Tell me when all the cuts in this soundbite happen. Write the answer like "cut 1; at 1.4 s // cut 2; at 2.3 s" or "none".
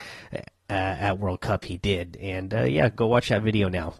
cut 1; at 1.6 s